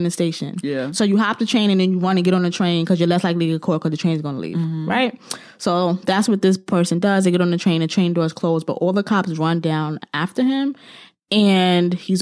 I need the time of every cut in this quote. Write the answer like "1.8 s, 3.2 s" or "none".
none